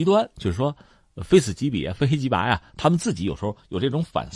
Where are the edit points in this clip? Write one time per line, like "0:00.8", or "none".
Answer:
none